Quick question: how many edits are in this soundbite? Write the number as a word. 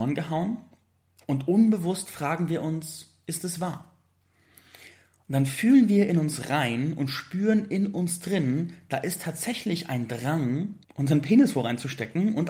one